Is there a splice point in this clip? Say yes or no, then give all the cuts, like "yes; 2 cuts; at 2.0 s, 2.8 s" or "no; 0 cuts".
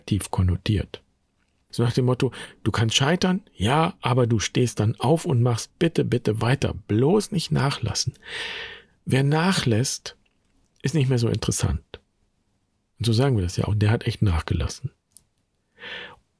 yes; 1 cut; at 1.7 s